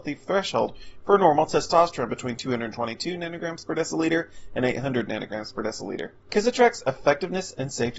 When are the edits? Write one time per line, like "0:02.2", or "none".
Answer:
0:06.2